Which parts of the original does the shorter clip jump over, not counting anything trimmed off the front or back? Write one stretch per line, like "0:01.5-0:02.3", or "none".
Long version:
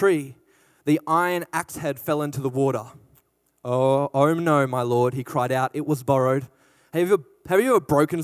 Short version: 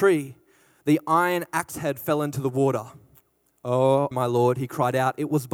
0:04.1-0:04.7